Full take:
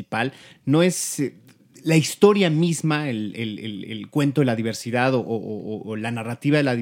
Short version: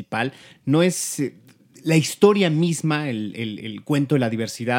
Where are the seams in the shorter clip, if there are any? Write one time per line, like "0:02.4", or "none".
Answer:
0:03.6

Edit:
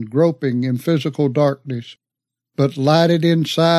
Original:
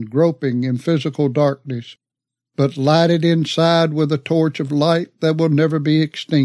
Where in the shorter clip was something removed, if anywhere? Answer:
none

